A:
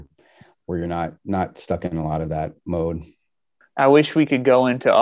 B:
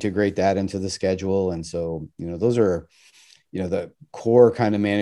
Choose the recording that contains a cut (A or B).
A